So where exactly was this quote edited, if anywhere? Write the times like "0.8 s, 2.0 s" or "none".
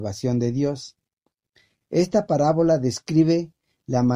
1.8 s